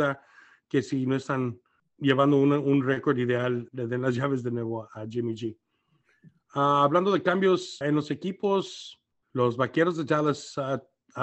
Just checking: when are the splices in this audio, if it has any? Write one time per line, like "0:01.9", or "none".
0:03.7
0:07.8